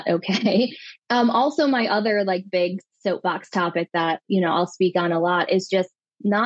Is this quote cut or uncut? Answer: uncut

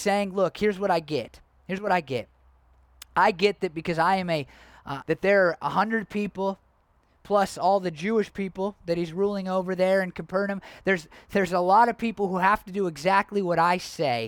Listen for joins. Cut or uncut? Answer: cut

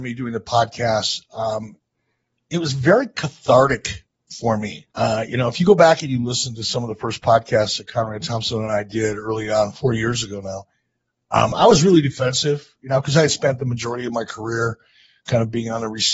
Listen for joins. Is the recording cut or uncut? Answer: cut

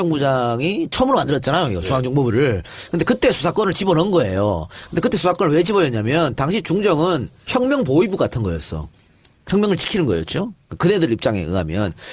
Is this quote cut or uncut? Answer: uncut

